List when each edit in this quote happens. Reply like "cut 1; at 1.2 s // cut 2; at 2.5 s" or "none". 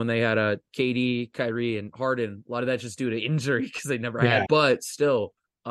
cut 1; at 4.5 s